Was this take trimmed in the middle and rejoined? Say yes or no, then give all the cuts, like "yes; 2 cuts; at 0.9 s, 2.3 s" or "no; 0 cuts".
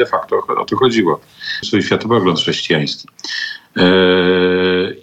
yes; 1 cut; at 1.6 s